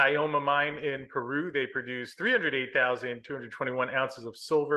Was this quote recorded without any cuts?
yes; 0 cuts

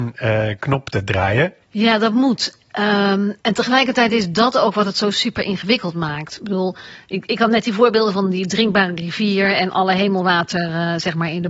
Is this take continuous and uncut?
no; 2 cuts; at 1.6 s, 3.4 s

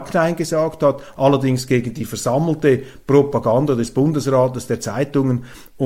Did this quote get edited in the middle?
no; 0 cuts

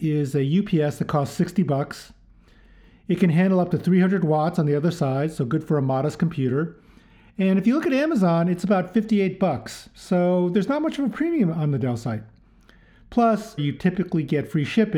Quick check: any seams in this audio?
yes; 1 cut; at 13.6 s

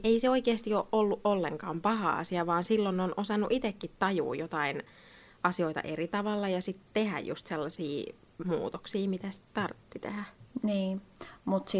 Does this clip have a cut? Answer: no; 0 cuts

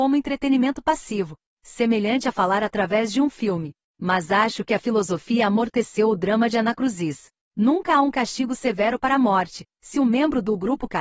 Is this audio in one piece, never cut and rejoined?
yes; 0 cuts

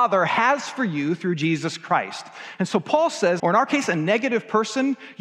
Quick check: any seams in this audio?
yes; 1 cut; at 3.4 s

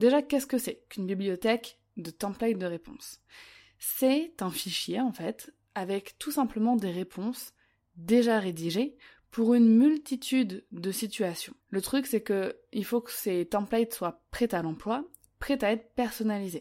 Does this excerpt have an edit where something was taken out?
yes; 1 cut; at 11.6 s

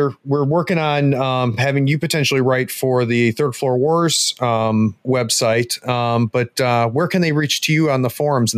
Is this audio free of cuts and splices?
yes; 0 cuts

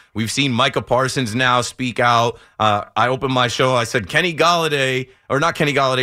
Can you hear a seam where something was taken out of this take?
no; 0 cuts

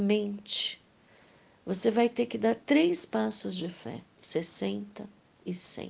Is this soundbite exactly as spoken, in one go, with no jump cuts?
no; 1 cut; at 4.1 s

